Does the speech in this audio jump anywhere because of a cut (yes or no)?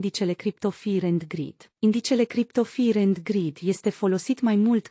yes